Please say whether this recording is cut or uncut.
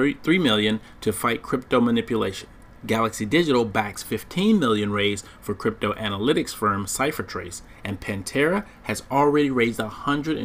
uncut